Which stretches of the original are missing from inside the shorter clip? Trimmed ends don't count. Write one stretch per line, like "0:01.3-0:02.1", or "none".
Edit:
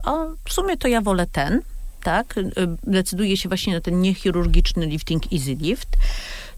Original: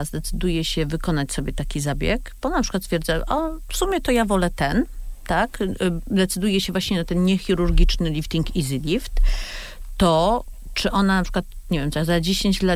none